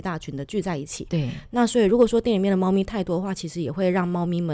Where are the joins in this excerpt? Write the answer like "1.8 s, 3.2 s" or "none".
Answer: none